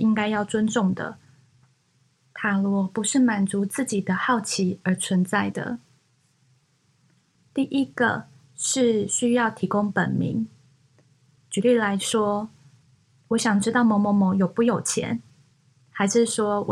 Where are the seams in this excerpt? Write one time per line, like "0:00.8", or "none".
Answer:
0:07.4
0:11.4

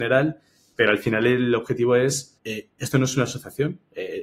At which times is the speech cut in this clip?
0:02.4

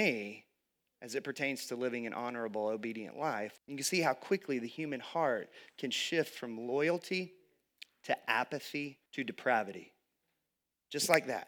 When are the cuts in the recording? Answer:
0:03.6
0:09.1

